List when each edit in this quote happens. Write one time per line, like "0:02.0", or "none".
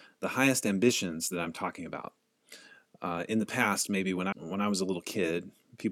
0:04.3